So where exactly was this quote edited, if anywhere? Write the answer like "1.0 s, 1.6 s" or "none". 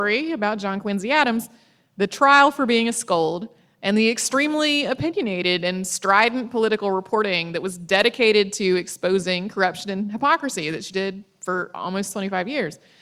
none